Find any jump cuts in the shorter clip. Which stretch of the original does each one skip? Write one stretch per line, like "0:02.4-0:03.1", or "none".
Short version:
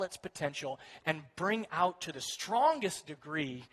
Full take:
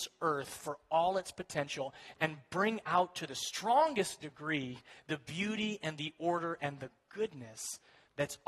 none